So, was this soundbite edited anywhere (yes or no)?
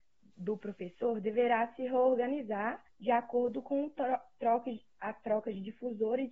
yes